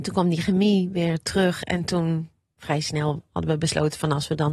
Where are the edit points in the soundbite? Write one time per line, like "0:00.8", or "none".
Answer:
none